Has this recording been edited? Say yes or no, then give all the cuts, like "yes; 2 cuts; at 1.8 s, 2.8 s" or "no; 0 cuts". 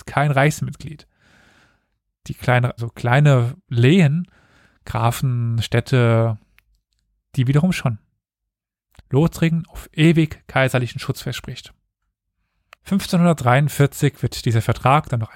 yes; 3 cuts; at 2.8 s, 9.0 s, 12.7 s